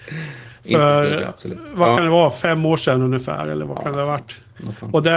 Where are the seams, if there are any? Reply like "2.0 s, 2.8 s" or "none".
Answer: none